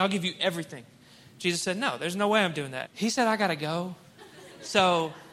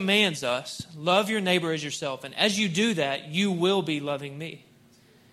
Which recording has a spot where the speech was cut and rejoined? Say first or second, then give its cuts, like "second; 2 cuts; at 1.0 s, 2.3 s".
first; 1 cut; at 2.9 s